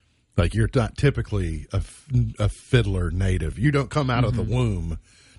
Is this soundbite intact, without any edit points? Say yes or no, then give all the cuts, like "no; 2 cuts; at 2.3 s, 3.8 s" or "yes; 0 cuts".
yes; 0 cuts